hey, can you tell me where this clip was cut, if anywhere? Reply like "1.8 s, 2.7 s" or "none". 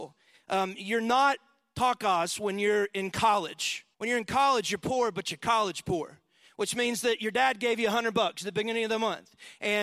3.9 s

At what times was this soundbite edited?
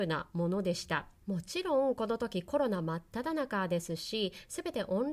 1.2 s

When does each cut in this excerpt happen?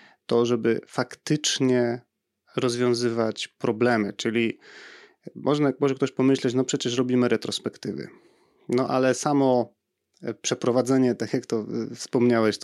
none

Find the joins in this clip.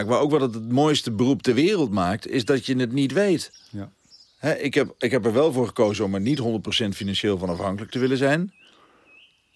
none

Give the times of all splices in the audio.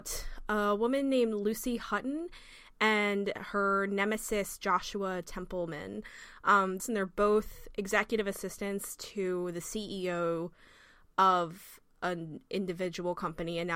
6.8 s

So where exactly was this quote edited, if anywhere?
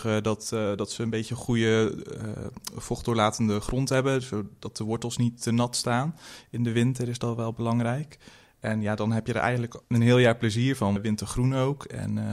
9.8 s, 11.0 s

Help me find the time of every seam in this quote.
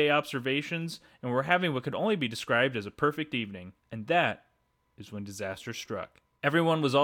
3.8 s

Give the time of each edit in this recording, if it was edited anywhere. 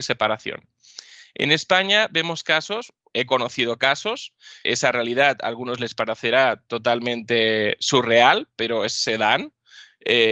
4.6 s

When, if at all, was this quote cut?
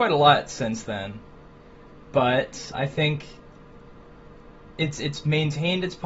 2.7 s

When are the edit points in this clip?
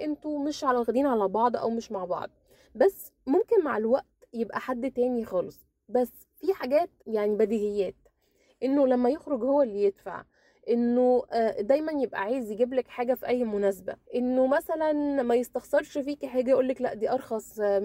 7.0 s, 14.0 s

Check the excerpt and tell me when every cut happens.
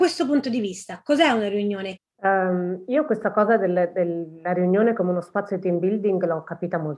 2.0 s

